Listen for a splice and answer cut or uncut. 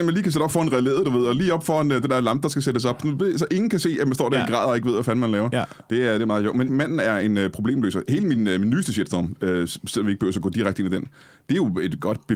cut